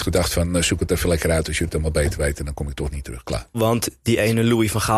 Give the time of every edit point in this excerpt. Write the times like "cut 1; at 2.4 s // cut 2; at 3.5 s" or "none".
cut 1; at 3.5 s